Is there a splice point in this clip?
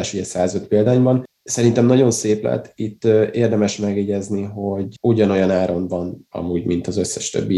no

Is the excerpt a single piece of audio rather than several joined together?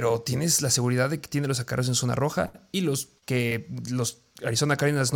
no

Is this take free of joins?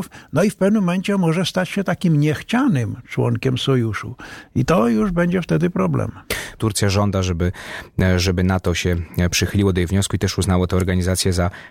no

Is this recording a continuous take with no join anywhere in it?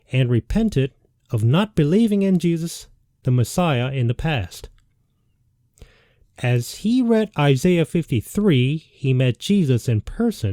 no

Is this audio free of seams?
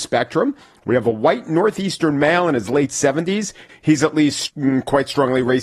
no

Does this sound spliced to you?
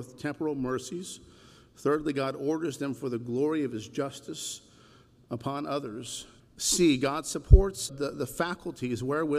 yes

